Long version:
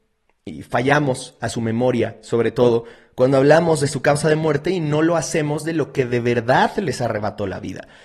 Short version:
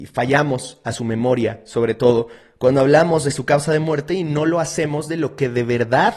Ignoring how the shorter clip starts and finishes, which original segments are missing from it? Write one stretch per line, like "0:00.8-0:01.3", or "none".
none